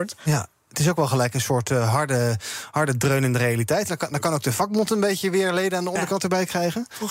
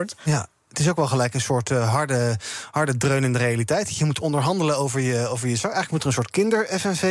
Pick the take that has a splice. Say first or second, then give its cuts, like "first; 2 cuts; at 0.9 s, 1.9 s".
first; 1 cut; at 3.9 s